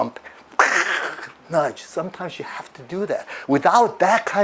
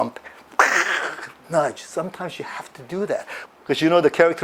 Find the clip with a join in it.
second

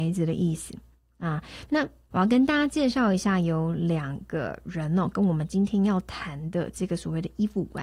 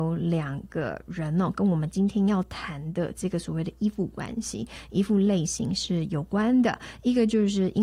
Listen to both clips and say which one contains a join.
first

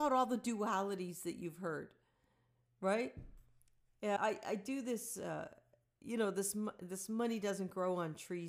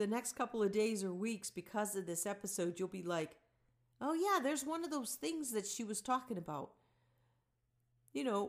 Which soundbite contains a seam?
first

